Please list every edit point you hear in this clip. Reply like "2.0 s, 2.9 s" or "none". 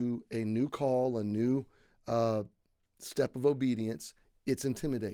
none